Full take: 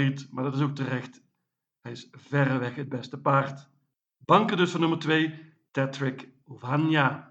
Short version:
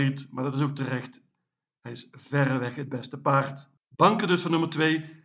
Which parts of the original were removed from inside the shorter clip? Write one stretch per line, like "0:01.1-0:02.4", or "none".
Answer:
0:03.8-0:04.1